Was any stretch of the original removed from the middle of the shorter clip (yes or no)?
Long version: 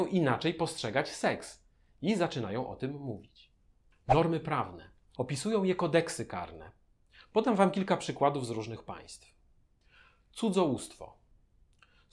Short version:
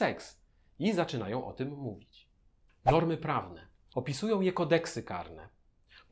no